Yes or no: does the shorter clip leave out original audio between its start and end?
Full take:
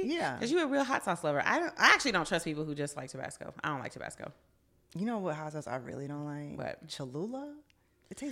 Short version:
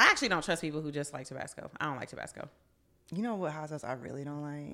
no